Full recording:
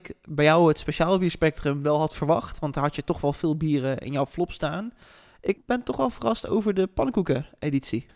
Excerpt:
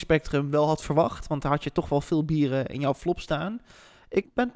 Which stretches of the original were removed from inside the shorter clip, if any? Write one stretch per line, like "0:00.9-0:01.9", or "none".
none